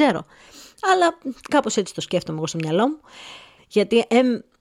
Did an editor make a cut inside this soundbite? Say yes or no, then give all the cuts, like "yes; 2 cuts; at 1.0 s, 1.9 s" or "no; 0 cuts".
yes; 1 cut; at 3.6 s